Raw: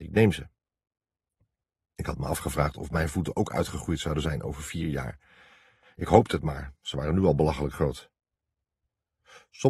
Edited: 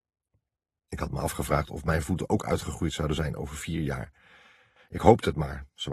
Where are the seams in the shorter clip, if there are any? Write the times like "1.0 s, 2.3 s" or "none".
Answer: none